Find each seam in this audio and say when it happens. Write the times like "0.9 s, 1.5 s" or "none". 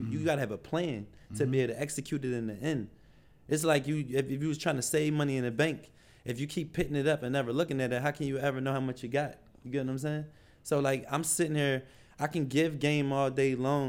none